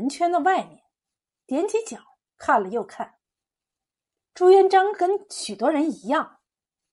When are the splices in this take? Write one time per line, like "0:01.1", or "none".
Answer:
0:04.2